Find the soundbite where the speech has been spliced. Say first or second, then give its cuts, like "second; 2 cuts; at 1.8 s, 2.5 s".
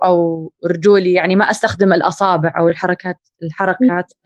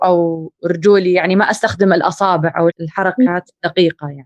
second; 1 cut; at 2.7 s